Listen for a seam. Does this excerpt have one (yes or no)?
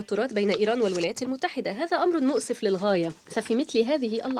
yes